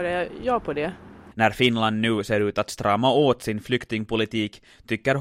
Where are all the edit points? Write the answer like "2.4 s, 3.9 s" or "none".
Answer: 1.3 s